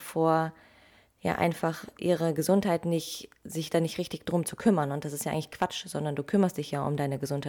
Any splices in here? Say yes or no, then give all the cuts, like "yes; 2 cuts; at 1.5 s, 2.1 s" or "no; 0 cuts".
no; 0 cuts